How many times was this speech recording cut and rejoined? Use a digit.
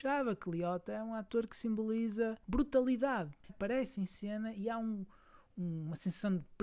2